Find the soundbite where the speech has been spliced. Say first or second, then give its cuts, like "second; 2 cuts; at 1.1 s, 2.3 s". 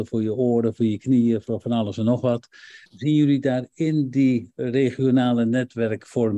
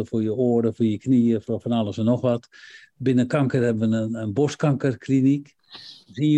first; 1 cut; at 2.9 s